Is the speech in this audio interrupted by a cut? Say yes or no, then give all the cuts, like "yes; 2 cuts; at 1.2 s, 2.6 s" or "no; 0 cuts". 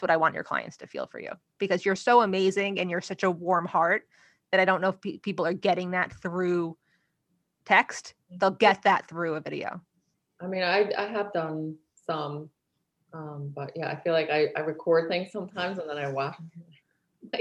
no; 0 cuts